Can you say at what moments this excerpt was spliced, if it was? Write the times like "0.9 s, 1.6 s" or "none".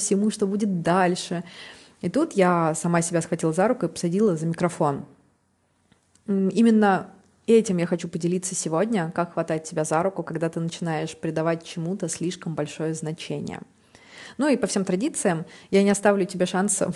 none